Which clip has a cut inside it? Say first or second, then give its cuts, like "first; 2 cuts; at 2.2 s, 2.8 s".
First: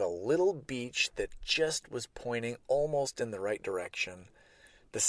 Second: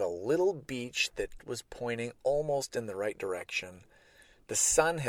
second; 1 cut; at 1.4 s